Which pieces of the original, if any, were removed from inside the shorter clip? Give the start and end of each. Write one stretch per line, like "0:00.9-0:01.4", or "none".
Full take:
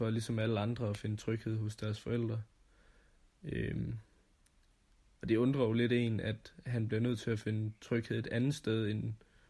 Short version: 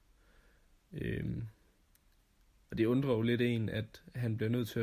none